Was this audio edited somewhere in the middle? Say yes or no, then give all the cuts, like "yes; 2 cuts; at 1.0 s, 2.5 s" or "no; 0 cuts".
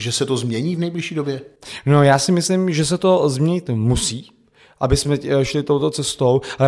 no; 0 cuts